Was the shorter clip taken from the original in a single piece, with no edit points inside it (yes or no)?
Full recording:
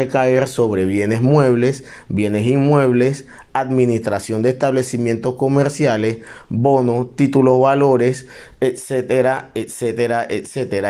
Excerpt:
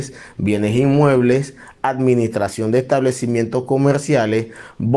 yes